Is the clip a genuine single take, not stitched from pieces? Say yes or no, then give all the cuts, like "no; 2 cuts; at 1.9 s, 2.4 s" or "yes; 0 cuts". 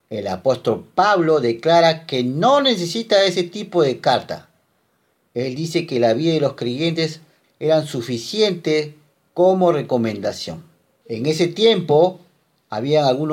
no; 2 cuts; at 7.4 s, 11.0 s